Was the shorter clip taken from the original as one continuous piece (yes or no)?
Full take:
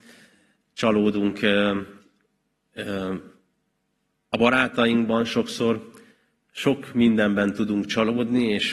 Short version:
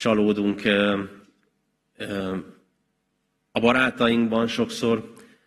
yes